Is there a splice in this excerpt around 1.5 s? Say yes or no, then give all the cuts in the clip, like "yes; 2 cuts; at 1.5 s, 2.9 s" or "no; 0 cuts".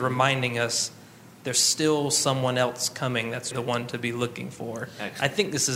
no; 1 cut; at 3.5 s